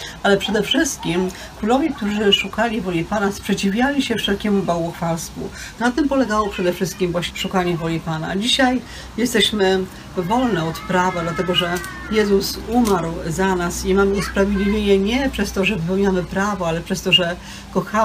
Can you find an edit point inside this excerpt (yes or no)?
yes